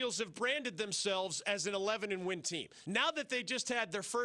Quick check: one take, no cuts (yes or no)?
yes